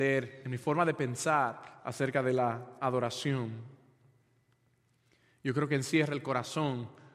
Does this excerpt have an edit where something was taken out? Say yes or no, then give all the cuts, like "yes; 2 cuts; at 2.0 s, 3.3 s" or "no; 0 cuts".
no; 0 cuts